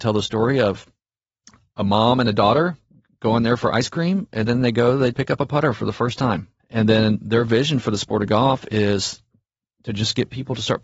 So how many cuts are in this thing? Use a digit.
2